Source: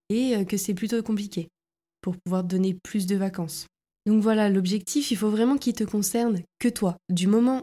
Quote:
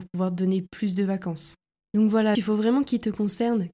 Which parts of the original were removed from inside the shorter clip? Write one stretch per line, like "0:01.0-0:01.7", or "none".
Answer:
0:04.5-0:05.1